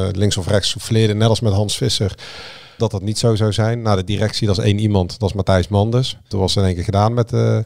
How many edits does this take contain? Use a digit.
2